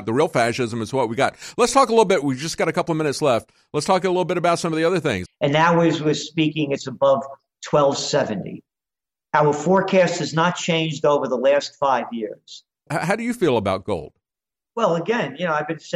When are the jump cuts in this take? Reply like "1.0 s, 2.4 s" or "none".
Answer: 5.3 s, 12.9 s